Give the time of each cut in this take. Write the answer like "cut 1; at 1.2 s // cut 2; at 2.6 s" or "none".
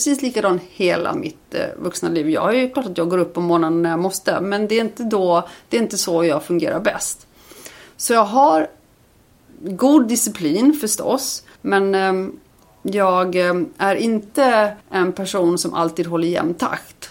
cut 1; at 11.6 s // cut 2; at 14.8 s